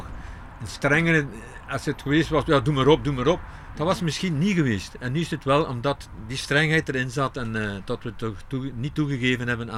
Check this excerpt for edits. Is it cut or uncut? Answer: uncut